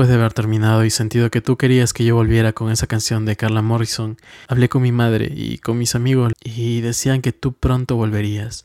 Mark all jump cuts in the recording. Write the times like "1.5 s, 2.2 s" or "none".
4.5 s, 6.3 s

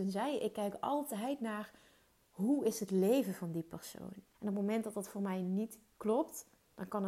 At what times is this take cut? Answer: 4.3 s

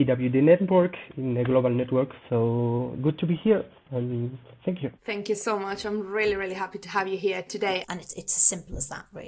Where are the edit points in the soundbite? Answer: 2.2 s, 5.0 s, 7.8 s

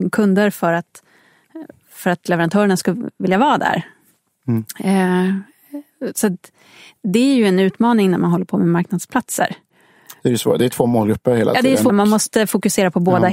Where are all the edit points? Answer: 11.9 s

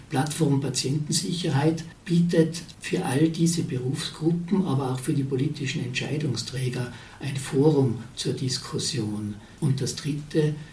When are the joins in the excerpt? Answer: 9.6 s

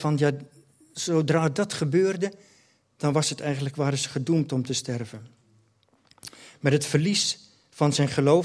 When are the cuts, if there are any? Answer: none

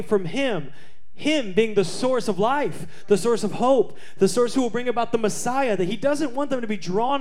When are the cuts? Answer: none

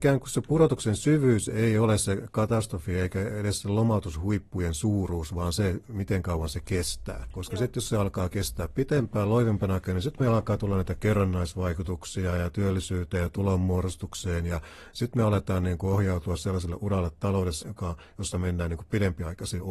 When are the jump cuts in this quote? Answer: 7.3 s, 17.6 s

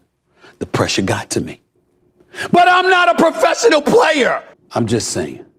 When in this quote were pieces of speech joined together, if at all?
4.5 s

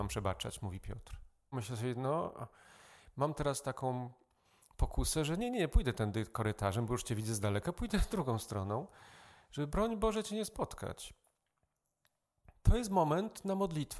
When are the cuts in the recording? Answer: 1.5 s

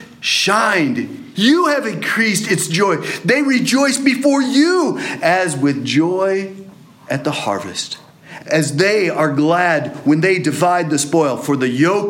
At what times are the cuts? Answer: 1.3 s, 8.4 s

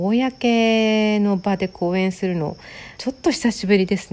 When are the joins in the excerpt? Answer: 2.9 s

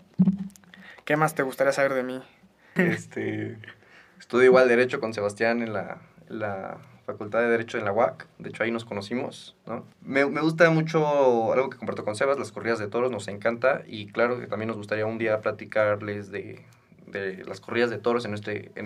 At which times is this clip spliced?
2.8 s, 9.9 s

